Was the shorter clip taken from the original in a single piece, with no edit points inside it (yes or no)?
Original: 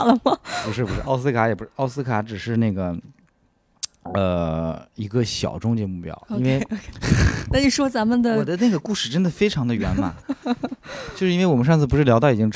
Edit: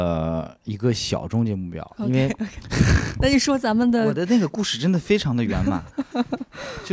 yes